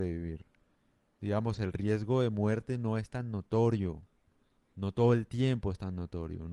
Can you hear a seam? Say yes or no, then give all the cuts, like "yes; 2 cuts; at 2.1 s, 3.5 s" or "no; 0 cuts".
no; 0 cuts